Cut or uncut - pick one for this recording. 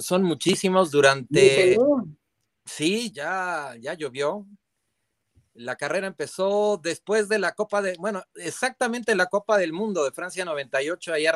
cut